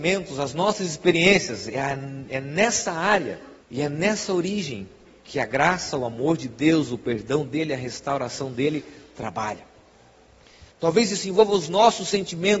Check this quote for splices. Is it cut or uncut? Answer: cut